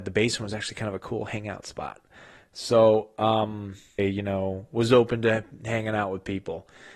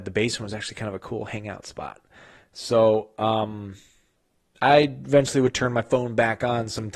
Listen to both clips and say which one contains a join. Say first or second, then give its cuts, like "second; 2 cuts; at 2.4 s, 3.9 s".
first; 1 cut; at 4.0 s